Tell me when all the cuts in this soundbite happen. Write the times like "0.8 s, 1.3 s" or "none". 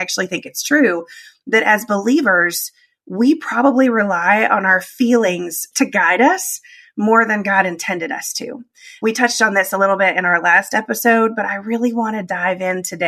none